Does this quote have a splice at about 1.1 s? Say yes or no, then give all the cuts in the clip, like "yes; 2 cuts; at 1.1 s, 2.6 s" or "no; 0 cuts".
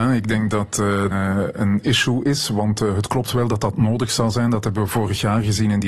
yes; 1 cut; at 1.1 s